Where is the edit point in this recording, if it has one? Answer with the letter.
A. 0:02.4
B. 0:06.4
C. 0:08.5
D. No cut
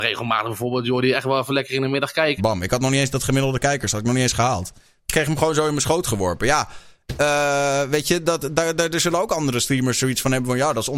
A